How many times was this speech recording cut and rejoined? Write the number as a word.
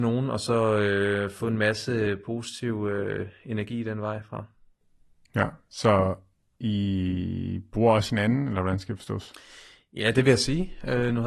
zero